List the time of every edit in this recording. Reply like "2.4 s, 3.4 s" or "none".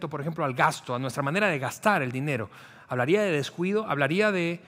none